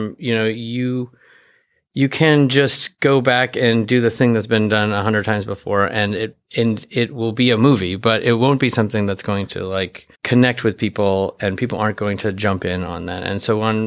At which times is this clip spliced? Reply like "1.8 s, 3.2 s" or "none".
6.5 s, 10.1 s

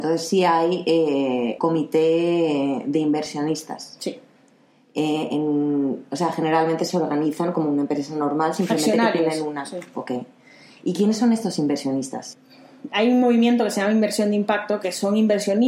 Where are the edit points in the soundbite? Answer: 1.6 s

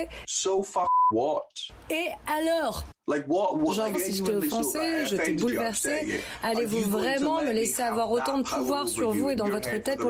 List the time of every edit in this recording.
3.9 s

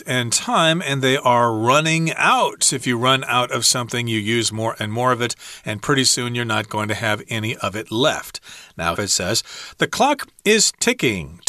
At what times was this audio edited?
8.9 s

